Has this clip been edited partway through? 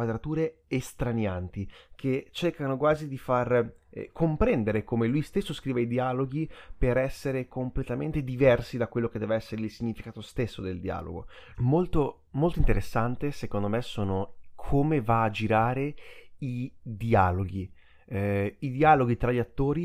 yes; 1 cut; at 11.5 s

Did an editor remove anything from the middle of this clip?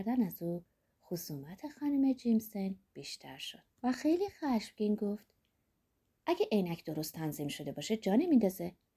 yes; 1 cut; at 3.7 s

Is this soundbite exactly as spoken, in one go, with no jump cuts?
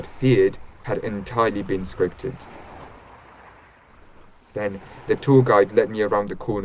yes; 0 cuts

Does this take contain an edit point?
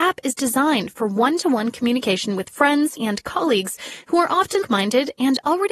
yes; 2 cuts; at 3.0 s, 4.6 s

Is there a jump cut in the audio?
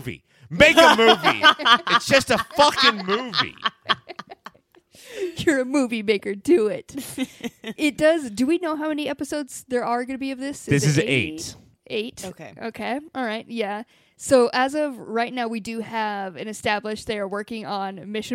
no; 0 cuts

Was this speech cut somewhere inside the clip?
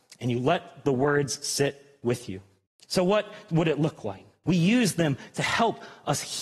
yes; 2 cuts; at 2.7 s, 4.4 s

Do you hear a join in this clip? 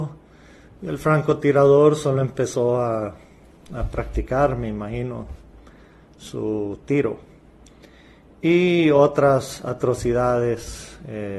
no; 0 cuts

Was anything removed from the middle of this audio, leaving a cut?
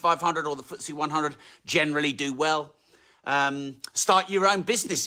no; 0 cuts

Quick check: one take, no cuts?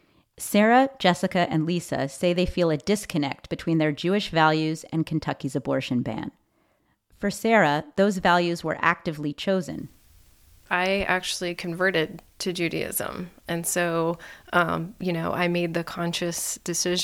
yes; 0 cuts

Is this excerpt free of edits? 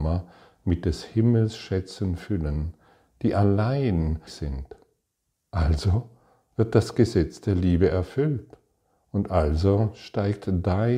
no; 1 cut; at 4.3 s

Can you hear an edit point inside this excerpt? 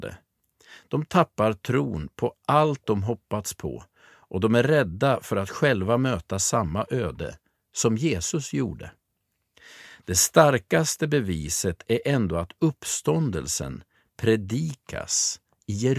no; 0 cuts

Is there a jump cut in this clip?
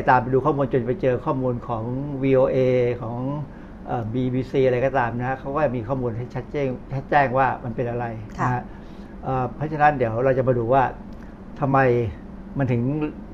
no; 0 cuts

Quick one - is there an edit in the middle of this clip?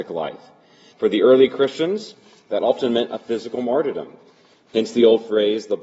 yes; 1 cut; at 0.9 s

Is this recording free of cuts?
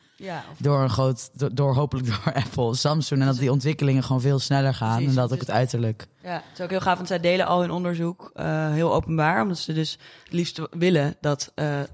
yes; 0 cuts

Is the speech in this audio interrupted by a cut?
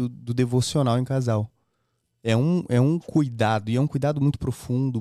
no; 0 cuts

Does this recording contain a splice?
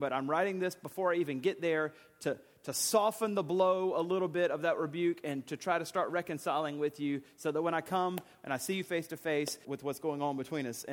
yes; 1 cut; at 9.6 s

